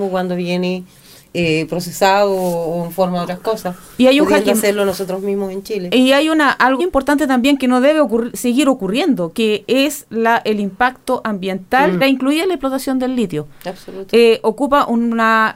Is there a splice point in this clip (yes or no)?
yes